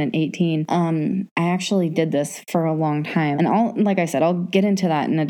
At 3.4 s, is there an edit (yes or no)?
yes